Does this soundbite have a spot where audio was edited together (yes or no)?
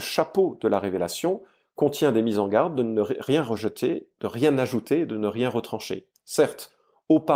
no